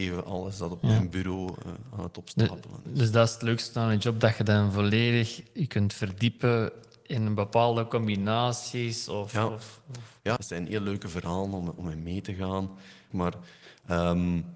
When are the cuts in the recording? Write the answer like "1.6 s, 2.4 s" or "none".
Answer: 10.4 s, 13.1 s